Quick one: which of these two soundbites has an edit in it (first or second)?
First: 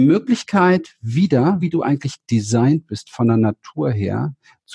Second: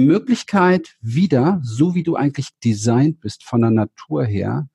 first